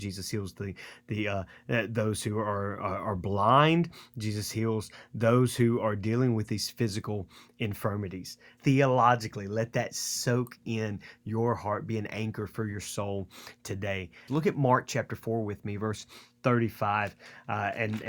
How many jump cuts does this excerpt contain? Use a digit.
2